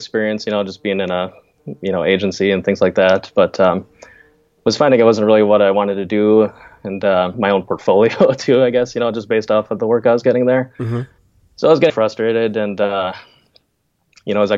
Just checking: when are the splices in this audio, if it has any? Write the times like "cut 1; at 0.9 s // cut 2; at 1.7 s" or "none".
cut 1; at 7.3 s // cut 2; at 11.9 s